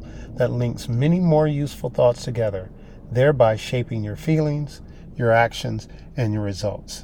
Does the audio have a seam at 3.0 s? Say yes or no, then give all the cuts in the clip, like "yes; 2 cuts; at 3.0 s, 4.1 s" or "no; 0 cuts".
no; 0 cuts